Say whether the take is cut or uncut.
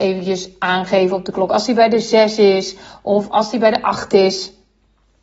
uncut